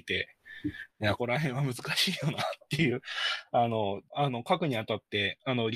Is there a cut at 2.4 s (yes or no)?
no